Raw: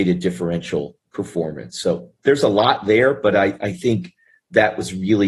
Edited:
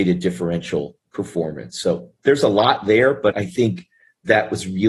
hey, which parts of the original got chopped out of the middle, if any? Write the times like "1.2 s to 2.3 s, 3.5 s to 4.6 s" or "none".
3.3 s to 3.6 s